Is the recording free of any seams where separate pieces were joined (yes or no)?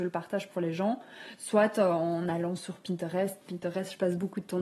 yes